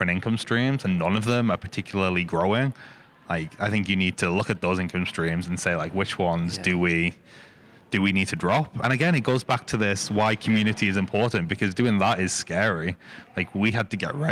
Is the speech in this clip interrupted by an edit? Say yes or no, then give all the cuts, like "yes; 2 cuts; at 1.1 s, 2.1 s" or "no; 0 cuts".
no; 0 cuts